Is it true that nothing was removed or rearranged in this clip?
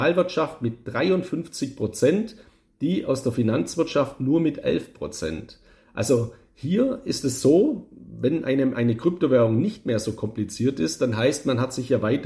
yes; 0 cuts

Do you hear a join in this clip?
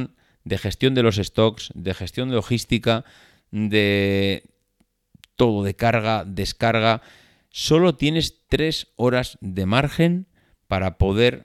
no; 0 cuts

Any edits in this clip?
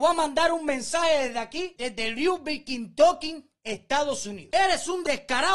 yes; 1 cut; at 4.5 s

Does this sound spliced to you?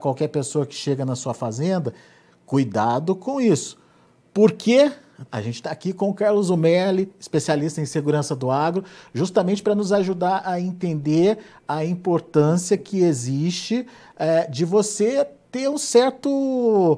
no; 0 cuts

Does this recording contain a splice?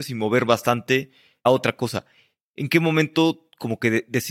no; 0 cuts

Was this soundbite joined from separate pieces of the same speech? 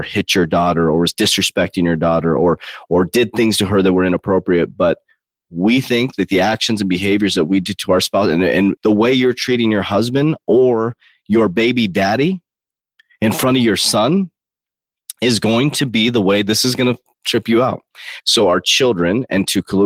yes; 2 cuts; at 8.8 s, 18.2 s

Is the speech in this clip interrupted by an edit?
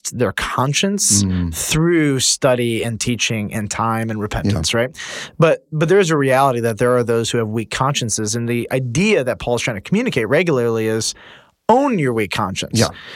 no; 0 cuts

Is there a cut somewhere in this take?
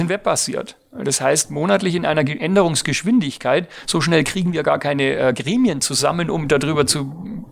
no; 0 cuts

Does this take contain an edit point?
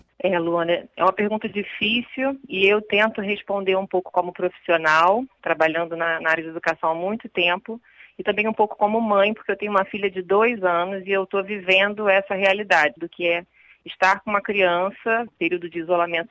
yes; 2 cuts; at 13.0 s, 15.3 s

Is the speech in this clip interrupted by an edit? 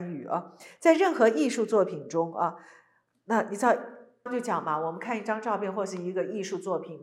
yes; 1 cut; at 4.3 s

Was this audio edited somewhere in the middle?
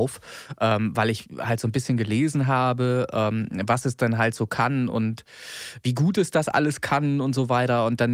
no; 0 cuts

